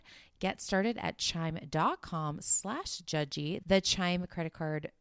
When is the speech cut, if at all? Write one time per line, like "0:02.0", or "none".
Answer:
0:03.6

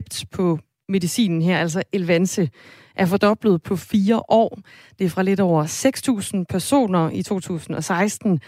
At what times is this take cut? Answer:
none

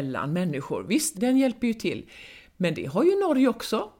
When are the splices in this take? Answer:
0:01.1

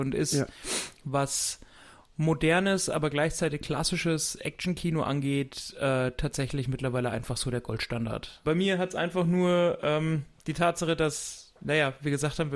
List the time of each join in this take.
0:08.4

